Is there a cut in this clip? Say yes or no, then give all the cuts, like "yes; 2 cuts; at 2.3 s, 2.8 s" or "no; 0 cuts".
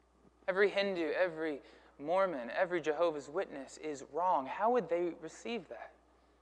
no; 0 cuts